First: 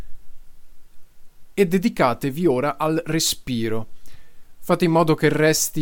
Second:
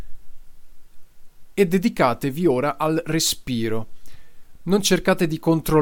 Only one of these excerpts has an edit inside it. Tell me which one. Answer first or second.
first